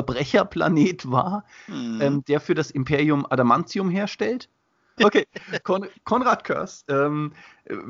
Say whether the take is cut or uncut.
cut